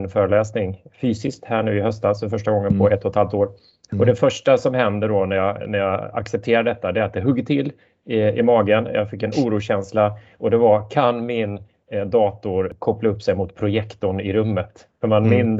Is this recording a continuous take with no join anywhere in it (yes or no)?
yes